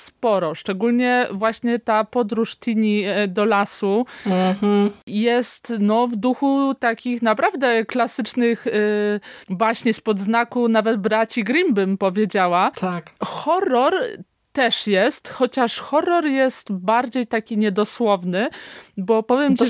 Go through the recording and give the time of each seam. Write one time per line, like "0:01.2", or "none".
none